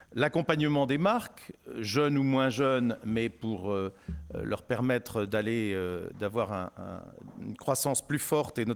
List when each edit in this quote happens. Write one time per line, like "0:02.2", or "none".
none